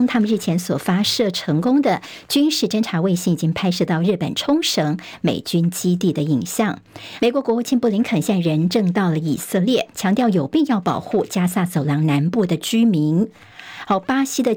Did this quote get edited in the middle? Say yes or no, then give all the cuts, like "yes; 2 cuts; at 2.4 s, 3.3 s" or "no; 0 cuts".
yes; 2 cuts; at 7.2 s, 9.9 s